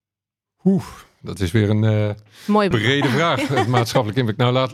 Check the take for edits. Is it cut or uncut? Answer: cut